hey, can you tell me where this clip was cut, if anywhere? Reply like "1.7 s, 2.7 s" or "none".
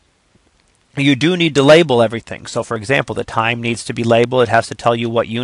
none